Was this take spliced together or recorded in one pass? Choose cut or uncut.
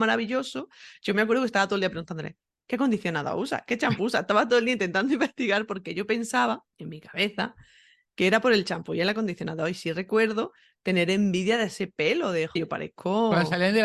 cut